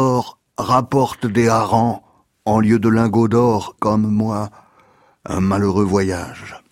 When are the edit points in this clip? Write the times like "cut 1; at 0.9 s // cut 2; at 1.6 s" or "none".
cut 1; at 3.8 s